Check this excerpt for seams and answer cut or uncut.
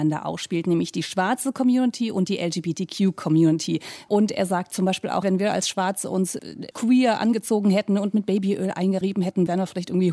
cut